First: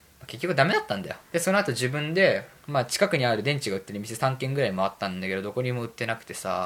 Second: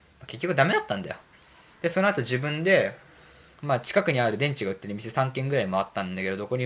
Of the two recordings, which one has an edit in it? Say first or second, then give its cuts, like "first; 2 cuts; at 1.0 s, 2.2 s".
first; 2 cuts; at 1.2 s, 2.6 s